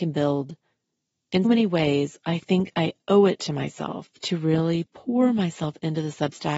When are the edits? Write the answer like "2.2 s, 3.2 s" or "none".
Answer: 1.4 s